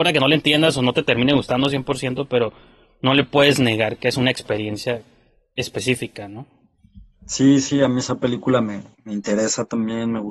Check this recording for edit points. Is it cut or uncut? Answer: uncut